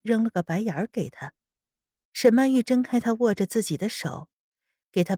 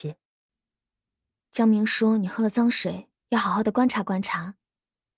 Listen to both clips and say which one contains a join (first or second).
first